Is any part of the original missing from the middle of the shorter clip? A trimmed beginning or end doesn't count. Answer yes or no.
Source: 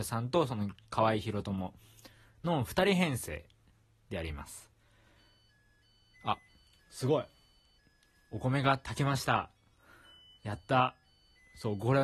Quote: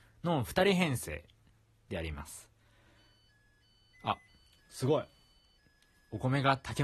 no